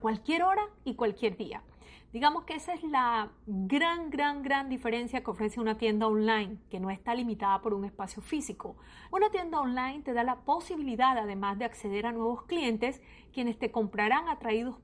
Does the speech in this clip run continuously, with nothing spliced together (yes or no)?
no